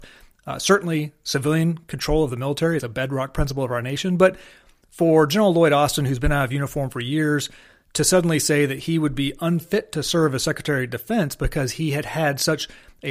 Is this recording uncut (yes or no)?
yes